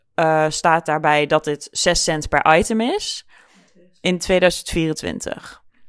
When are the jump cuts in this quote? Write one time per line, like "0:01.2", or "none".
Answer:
none